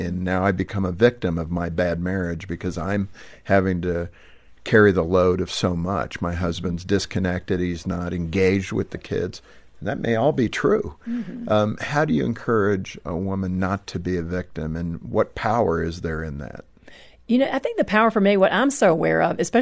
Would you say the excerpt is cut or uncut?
uncut